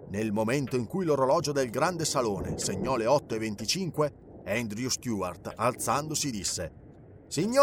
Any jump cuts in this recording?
no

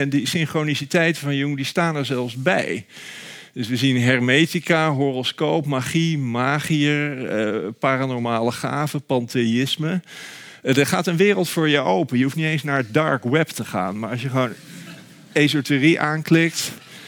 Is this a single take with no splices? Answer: yes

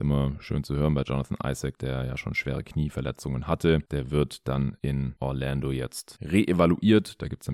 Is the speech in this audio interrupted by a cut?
no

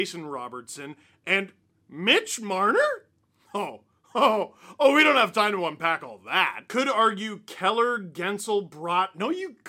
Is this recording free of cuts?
yes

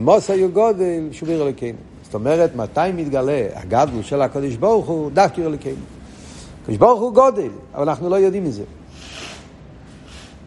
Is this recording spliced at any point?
no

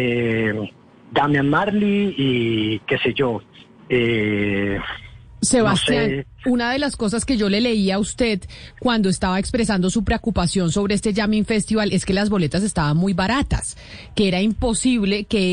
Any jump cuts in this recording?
no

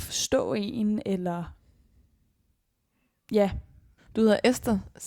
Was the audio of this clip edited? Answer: yes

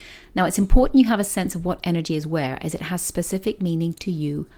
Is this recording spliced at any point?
no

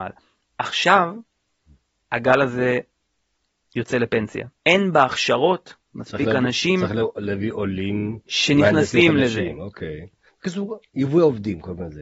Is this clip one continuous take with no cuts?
no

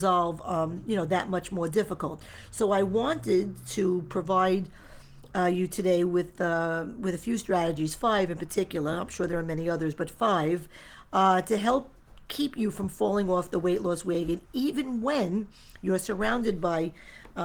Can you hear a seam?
no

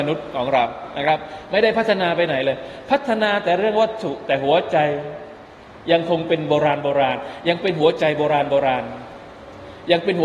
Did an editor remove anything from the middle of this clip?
no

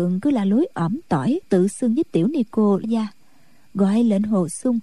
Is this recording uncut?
no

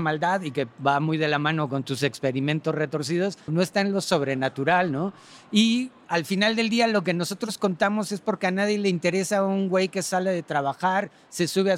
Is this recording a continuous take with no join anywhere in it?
no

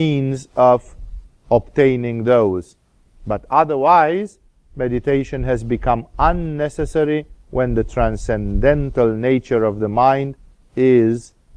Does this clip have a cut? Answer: no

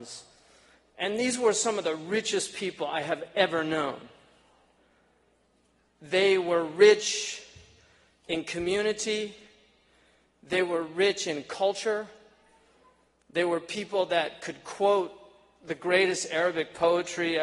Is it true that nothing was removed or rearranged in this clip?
yes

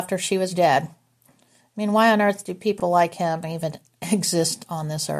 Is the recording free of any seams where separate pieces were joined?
yes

